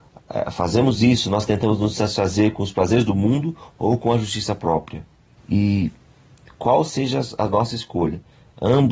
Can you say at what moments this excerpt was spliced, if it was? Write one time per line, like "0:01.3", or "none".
0:05.4